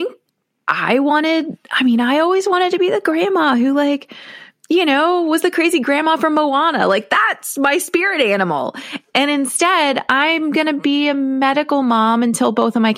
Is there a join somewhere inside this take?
no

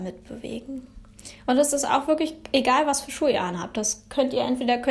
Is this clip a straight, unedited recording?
yes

